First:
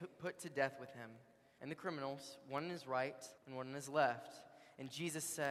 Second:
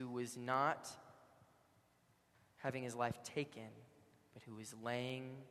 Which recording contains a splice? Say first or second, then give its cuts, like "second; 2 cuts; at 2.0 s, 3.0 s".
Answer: first; 2 cuts; at 1.6 s, 3.4 s